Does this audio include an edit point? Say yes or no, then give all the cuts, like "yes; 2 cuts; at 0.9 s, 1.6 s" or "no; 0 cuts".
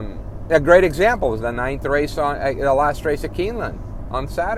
no; 0 cuts